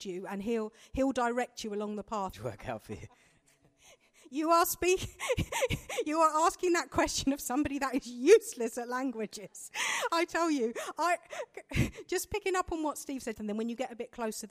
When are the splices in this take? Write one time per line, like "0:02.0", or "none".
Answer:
0:02.3
0:13.4